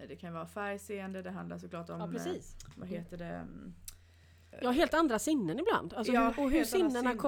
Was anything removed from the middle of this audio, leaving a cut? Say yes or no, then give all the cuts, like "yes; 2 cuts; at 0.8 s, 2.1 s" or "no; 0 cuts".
yes; 1 cut; at 4.5 s